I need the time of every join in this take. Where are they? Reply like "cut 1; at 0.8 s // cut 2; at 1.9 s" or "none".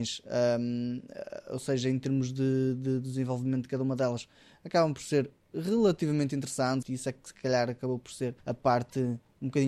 cut 1; at 6.8 s // cut 2; at 8.4 s